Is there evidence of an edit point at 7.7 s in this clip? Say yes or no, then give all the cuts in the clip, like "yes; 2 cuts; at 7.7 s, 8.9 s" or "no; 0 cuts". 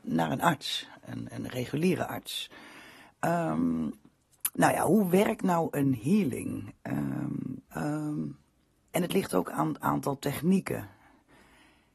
yes; 1 cut; at 7.7 s